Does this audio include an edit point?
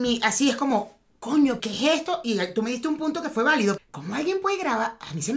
yes; 2 cuts; at 1.6 s, 3.8 s

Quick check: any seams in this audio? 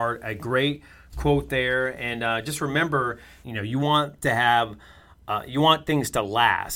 yes; 1 cut; at 3.4 s

